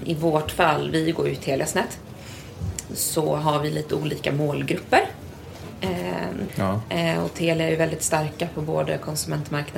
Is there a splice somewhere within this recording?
yes; 2 cuts; at 2.9 s, 6.5 s

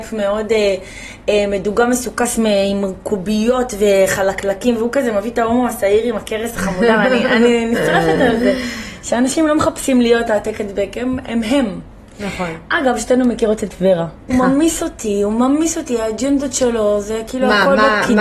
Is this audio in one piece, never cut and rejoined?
no; 1 cut; at 14.3 s

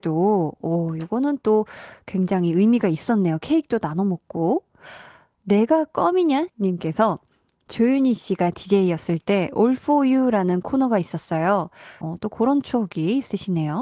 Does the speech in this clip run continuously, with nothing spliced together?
no; 2 cuts; at 6.5 s, 12.0 s

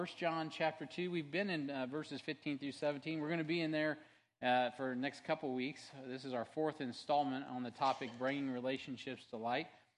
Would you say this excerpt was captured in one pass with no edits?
yes; 0 cuts

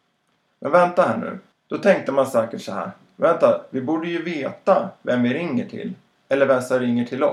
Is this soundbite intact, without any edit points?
yes; 0 cuts

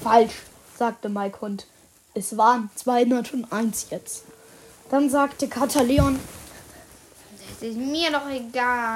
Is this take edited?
no; 0 cuts

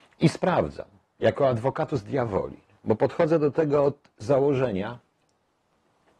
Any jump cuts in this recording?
no; 0 cuts

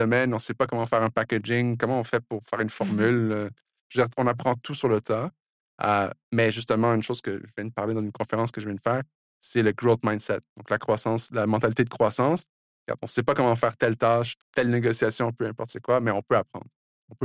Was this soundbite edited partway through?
yes; 2 cuts; at 12.7 s, 14.4 s

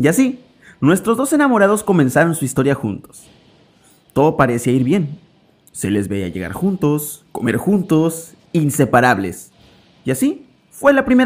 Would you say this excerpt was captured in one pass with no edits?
no; 1 cut; at 8.5 s

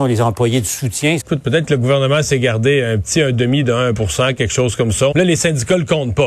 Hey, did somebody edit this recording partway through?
yes; 2 cuts; at 1.2 s, 5.1 s

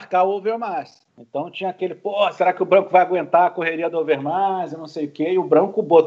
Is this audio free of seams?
no; 1 cut; at 1.1 s

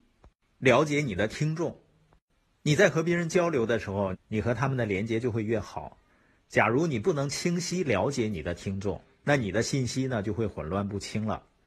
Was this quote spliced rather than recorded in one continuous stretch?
yes; 1 cut; at 4.1 s

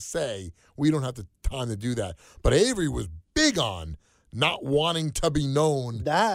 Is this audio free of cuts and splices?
yes; 0 cuts

